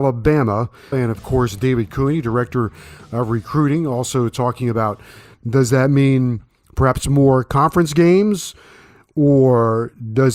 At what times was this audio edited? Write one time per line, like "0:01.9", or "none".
0:00.9
0:05.3